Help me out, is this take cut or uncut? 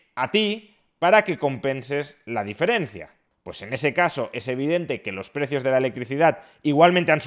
uncut